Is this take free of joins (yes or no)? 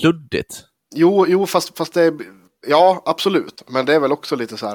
yes